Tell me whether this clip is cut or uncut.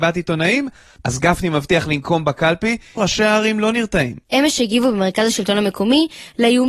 cut